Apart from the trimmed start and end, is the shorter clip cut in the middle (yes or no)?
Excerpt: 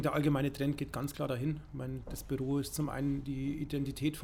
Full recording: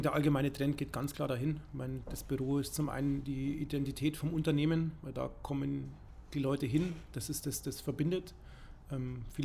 no